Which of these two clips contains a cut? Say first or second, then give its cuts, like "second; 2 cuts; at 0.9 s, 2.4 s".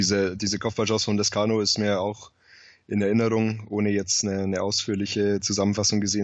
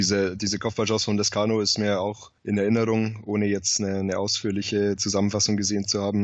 second; 1 cut; at 2.4 s